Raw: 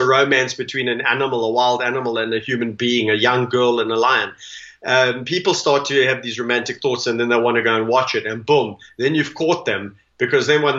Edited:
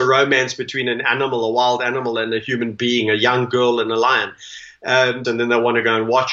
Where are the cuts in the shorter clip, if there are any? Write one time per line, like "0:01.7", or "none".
0:05.2